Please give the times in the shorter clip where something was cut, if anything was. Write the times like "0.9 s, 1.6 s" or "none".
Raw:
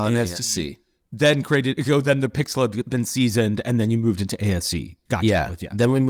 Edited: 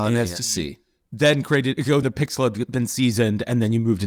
2.0 s